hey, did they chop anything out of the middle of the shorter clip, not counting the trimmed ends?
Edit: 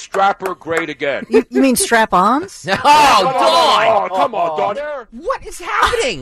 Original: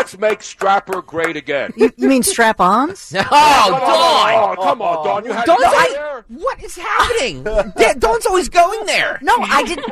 yes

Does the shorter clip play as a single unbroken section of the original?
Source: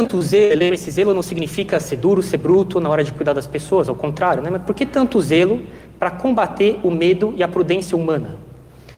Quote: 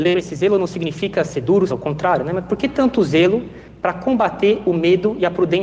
no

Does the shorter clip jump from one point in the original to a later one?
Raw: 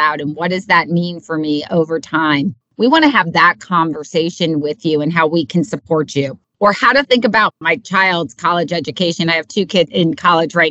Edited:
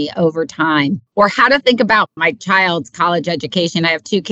yes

